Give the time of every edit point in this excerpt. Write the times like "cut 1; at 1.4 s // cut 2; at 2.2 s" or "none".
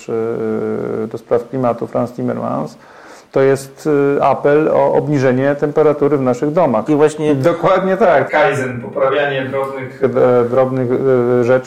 cut 1; at 6.9 s // cut 2; at 8.3 s